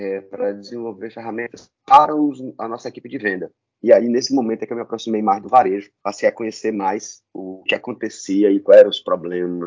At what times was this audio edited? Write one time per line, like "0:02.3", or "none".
0:06.0
0:07.7